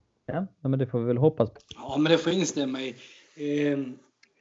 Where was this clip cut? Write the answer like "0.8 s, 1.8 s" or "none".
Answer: 1.6 s